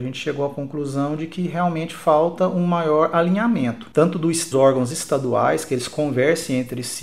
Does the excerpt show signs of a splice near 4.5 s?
yes; 1 cut; at 4.5 s

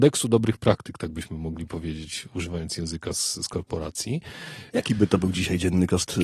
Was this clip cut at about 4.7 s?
yes; 1 cut; at 4.7 s

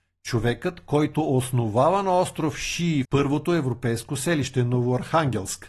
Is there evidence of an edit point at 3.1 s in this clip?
yes; 1 cut; at 3.1 s

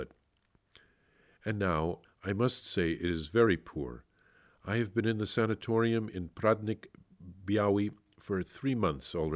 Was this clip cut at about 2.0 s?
yes; 1 cut; at 2.0 s

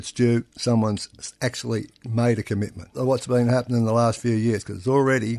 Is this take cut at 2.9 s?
yes; 1 cut; at 2.9 s

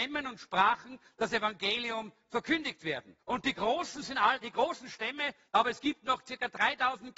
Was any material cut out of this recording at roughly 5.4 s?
yes; 2 cuts; at 3.2 s, 5.4 s

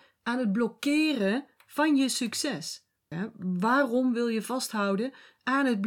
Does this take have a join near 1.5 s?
no; 1 cut; at 3.1 s

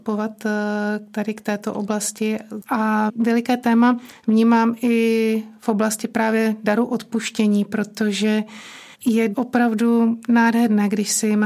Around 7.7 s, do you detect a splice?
no; 1 cut; at 2.6 s

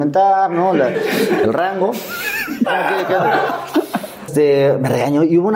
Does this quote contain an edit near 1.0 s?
no; 2 cuts; at 2.7 s, 4.3 s

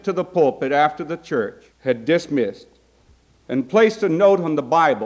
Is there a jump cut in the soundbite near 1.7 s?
yes; 1 cut; at 1.7 s

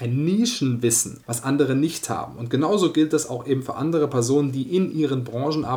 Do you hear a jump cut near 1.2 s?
yes; 1 cut; at 1.2 s

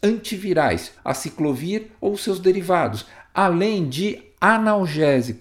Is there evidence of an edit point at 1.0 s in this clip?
yes; 1 cut; at 1.0 s

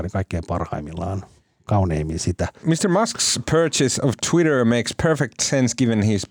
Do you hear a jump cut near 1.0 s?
no; 1 cut; at 2.6 s

